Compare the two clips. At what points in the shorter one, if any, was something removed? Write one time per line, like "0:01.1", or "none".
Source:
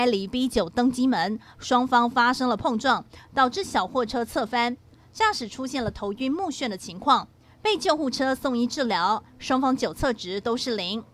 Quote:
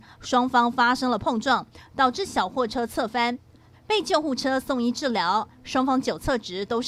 0:03.7

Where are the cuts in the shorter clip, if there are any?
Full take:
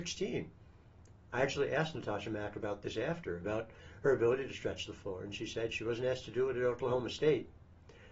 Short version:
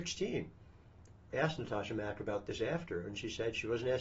0:01.3
0:03.0

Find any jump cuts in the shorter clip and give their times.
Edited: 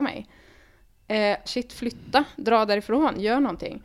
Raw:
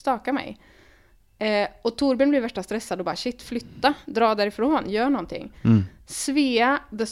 0:01.5

